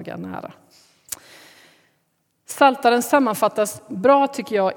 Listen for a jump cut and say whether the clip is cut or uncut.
uncut